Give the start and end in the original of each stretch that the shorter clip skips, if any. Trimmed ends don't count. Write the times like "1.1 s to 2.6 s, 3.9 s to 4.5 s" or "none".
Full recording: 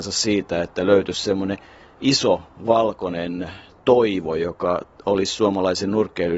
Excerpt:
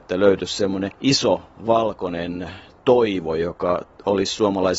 1.6 s to 1.9 s